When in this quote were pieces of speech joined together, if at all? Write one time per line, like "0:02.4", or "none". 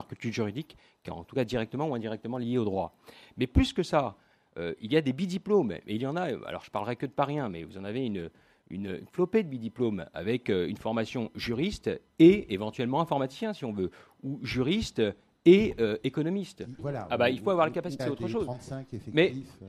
0:16.8
0:18.0